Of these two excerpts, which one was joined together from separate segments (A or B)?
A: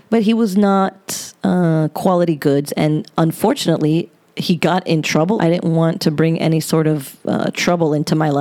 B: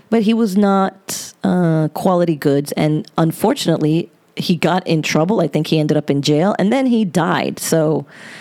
A